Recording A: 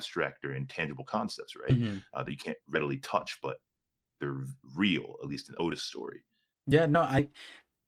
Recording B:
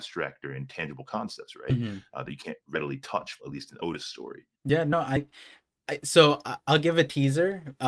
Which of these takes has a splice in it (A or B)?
B